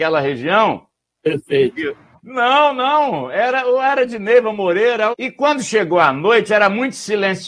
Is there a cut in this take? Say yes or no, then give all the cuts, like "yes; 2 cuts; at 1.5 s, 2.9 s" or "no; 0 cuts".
yes; 2 cuts; at 2.2 s, 5.1 s